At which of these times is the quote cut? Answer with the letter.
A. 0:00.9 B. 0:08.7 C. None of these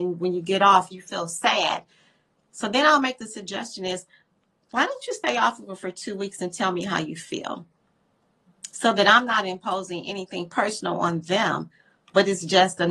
A